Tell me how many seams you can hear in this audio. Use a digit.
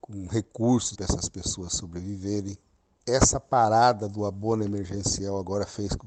2